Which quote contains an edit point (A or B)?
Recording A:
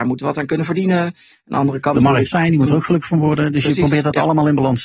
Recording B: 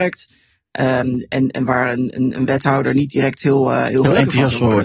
A